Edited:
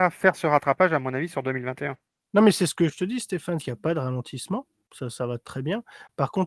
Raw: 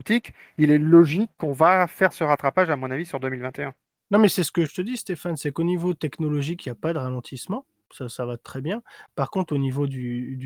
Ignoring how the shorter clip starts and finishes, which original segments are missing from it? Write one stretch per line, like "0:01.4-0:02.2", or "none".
0:05.4-0:06.6